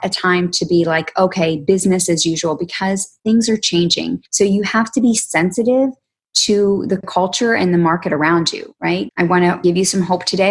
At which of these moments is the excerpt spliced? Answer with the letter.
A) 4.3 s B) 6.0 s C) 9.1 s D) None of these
C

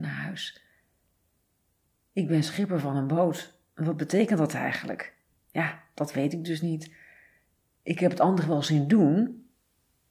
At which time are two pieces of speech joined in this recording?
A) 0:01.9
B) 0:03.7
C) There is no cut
C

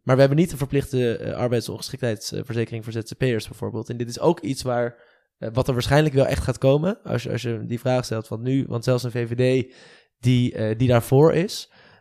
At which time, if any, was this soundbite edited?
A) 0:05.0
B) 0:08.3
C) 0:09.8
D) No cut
D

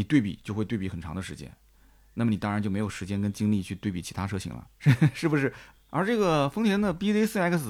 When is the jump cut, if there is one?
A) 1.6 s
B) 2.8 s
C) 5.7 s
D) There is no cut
C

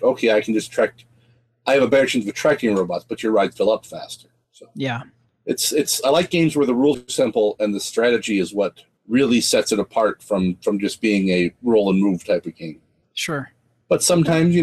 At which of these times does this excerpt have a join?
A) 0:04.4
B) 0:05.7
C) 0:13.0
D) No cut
C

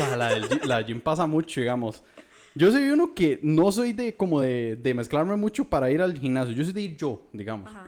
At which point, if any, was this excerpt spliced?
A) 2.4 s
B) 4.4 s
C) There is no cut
C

